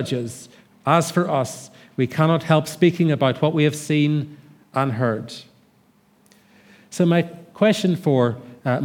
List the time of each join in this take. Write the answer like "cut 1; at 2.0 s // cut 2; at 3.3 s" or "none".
none